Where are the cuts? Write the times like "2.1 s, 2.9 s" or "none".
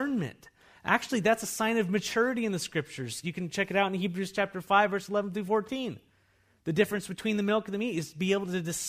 none

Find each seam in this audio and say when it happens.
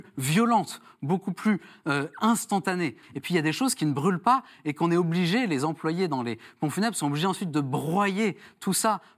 3.0 s

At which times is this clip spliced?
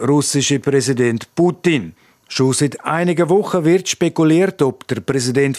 none

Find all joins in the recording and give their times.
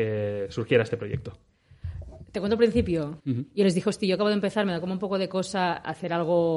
3.2 s

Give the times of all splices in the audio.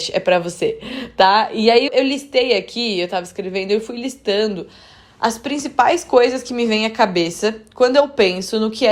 1.9 s

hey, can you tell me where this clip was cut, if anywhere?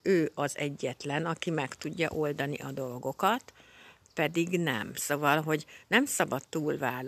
none

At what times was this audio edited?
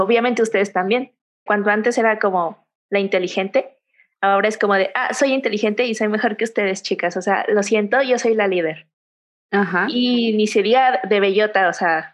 1.5 s

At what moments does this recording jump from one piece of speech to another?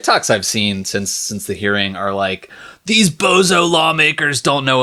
none

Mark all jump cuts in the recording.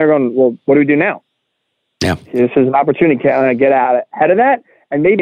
none

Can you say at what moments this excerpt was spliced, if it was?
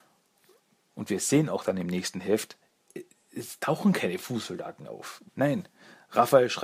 0.9 s, 5.3 s

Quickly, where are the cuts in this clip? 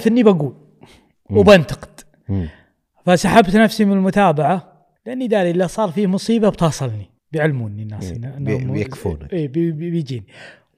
5.0 s, 7.2 s

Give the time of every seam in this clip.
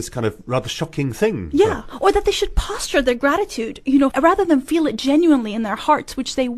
4.1 s

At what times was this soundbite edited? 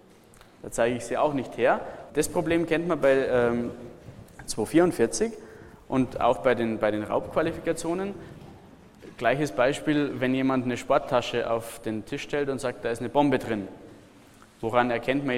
2.1 s

